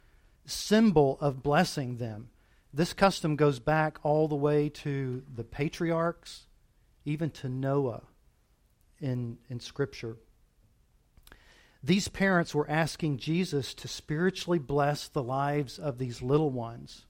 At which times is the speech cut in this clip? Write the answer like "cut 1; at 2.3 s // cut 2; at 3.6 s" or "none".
none